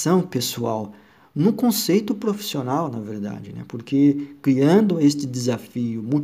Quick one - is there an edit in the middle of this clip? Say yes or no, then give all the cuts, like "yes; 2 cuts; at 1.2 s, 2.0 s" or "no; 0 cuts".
no; 0 cuts